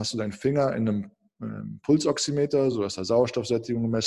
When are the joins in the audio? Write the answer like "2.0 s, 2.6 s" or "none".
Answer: none